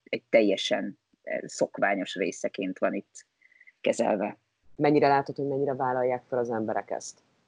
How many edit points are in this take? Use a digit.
1